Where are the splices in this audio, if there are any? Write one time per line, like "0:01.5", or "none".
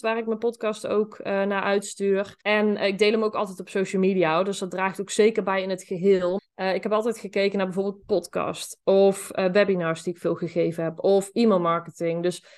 0:02.4
0:06.4